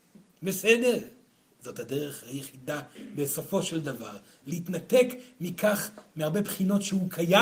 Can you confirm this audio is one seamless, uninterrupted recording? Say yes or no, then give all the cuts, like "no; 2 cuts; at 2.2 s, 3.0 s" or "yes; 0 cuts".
yes; 0 cuts